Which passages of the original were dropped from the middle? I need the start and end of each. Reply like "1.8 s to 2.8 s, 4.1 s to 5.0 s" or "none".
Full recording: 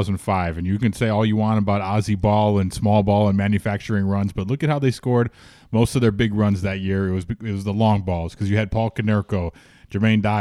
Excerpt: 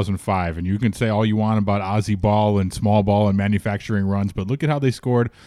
none